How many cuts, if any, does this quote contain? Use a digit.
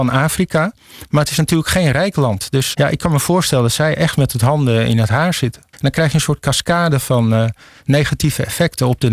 2